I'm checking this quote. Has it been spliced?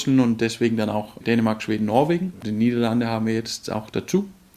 yes; 1 cut; at 1.2 s

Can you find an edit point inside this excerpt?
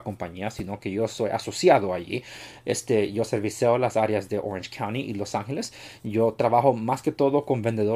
no; 0 cuts

